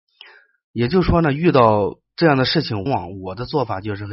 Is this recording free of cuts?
no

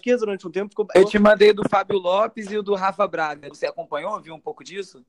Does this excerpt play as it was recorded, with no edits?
no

